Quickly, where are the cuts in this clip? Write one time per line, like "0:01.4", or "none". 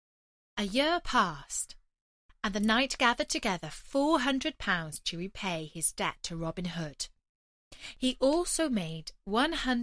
none